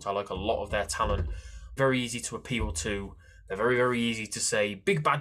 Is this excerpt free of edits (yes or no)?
no